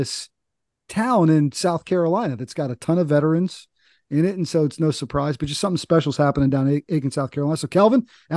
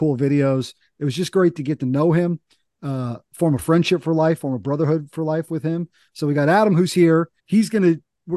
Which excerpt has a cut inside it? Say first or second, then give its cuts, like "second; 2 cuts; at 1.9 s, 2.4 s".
second; 1 cut; at 7.4 s